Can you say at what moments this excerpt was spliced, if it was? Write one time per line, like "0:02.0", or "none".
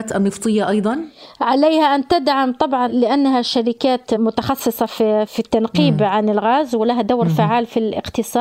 0:05.3

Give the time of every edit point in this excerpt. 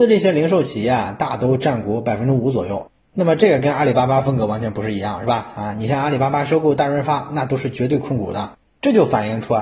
none

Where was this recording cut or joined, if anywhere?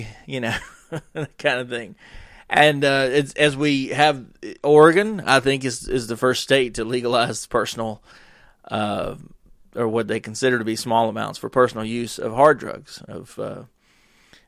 none

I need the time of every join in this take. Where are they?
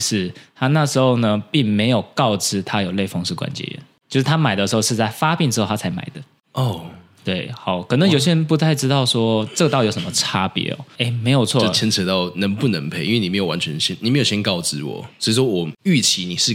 0:11.0

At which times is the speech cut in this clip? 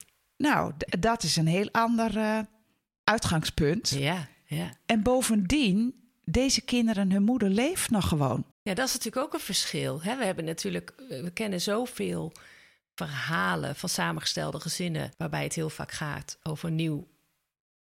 0:08.5
0:15.1

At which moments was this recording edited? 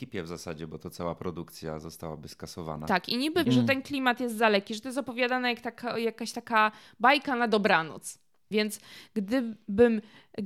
0:03.4
0:08.5

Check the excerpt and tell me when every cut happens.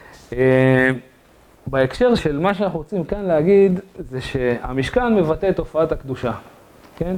0:02.2

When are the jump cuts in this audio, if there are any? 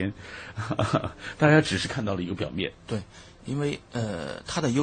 none

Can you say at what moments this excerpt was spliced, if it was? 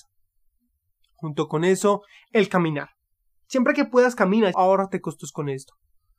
0:04.5

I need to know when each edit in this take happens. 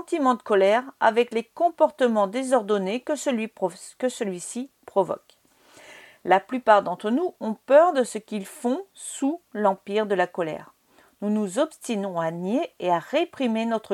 none

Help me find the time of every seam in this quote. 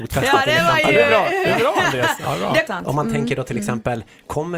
0:02.7

